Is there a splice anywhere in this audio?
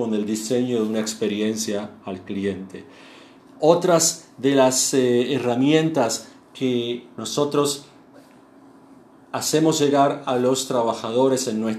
yes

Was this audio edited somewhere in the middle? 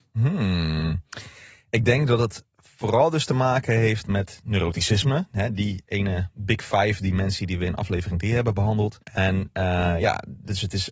yes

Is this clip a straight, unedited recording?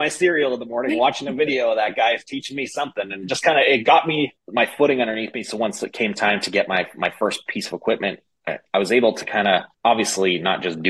yes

